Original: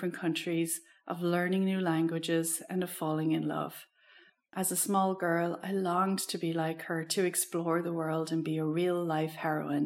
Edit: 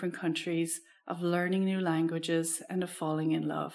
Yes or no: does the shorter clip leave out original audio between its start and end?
no